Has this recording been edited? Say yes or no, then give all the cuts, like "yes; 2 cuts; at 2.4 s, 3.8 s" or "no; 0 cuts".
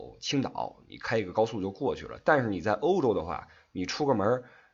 no; 0 cuts